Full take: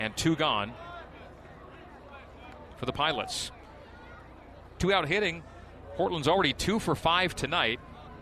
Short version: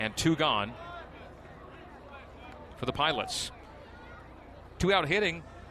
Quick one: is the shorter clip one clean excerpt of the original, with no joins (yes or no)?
yes